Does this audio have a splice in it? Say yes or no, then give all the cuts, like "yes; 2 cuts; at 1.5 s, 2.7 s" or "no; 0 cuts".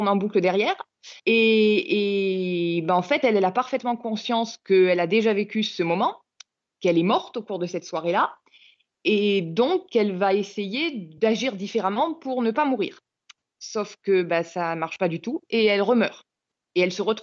yes; 1 cut; at 1.2 s